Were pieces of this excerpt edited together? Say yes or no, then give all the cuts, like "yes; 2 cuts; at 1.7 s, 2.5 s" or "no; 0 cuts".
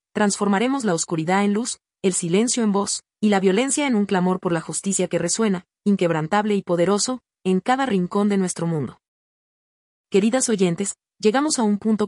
no; 0 cuts